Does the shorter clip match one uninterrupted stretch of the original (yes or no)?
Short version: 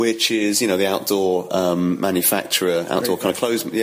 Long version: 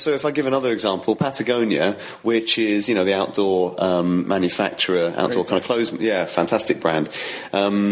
yes